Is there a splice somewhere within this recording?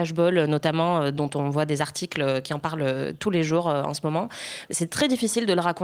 no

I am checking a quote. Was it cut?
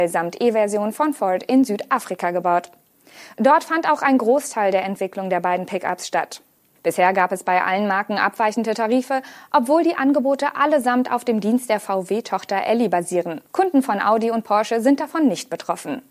yes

